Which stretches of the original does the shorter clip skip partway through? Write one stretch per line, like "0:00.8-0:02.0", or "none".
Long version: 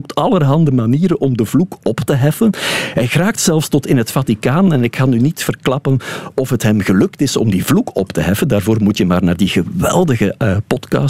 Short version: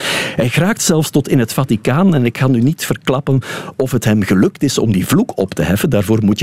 none